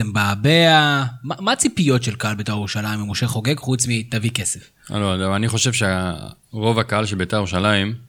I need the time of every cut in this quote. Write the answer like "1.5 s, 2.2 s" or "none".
none